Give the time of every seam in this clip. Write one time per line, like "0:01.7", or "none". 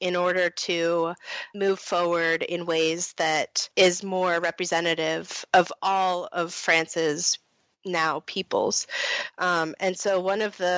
none